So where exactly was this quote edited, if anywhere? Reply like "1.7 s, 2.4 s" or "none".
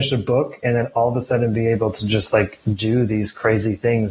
none